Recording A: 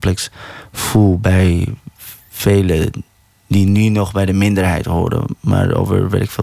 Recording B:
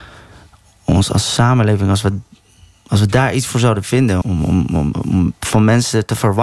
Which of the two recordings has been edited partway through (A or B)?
B